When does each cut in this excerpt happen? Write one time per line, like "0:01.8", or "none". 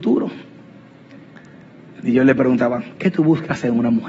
none